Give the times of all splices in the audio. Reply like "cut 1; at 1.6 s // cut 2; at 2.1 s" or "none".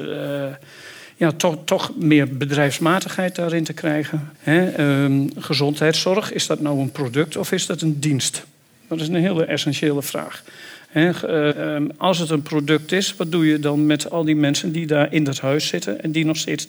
cut 1; at 4.3 s // cut 2; at 11.5 s